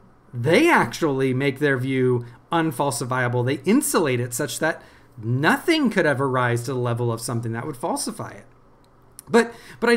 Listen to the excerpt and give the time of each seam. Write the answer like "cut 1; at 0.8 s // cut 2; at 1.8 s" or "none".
none